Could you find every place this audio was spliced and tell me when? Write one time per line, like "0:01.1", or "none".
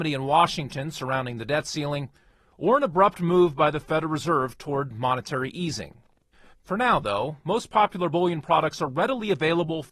none